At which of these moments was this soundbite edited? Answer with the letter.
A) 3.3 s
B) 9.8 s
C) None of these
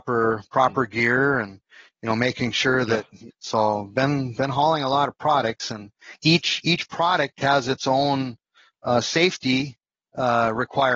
A